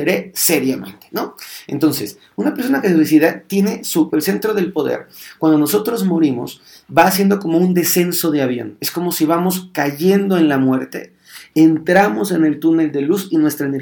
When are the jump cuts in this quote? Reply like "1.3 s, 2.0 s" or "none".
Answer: 4.1 s